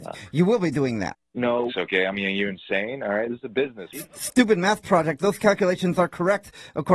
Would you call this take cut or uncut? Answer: cut